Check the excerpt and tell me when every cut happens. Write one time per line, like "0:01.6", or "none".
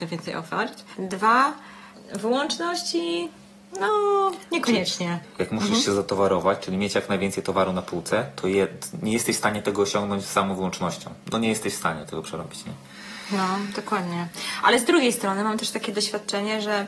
0:11.2